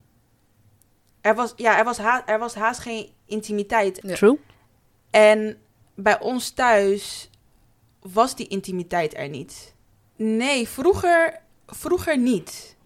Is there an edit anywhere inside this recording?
yes; 2 cuts; at 4.0 s, 10.2 s

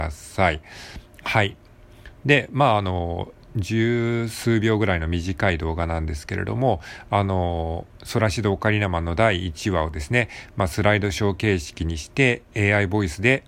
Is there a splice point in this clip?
no; 0 cuts

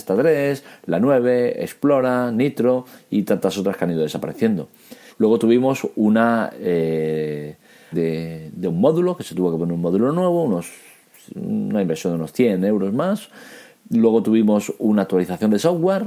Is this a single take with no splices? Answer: no; 2 cuts; at 5.1 s, 7.9 s

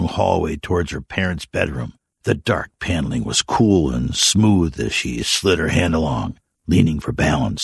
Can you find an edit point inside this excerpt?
no; 0 cuts

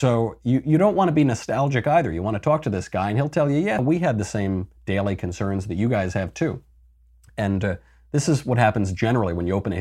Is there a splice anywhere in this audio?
yes; 1 cut; at 3.8 s

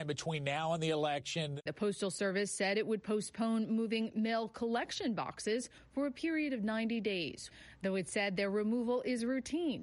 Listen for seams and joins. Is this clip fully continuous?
yes; 0 cuts

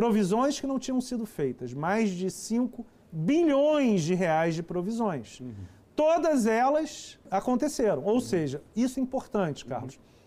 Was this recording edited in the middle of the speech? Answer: yes; 2 cuts; at 7.3 s, 8.9 s

